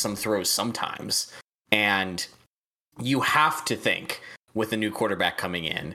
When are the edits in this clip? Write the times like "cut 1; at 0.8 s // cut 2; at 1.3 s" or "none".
cut 1; at 1.6 s